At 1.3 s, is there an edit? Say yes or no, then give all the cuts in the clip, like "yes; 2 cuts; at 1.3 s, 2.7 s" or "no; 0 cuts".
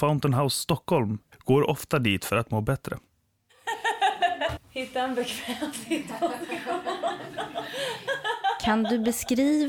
yes; 2 cuts; at 1.3 s, 4.6 s